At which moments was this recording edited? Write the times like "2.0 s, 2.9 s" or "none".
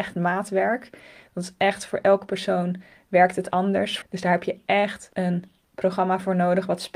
4.0 s, 5.1 s